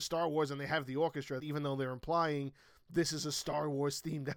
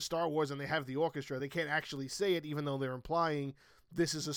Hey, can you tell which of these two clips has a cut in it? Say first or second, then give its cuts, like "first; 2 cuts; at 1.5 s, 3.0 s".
first; 1 cut; at 1.4 s